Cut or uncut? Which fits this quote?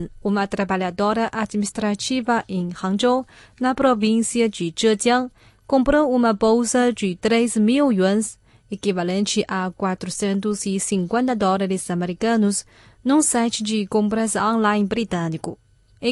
uncut